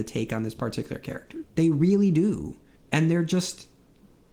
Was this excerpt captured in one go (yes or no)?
no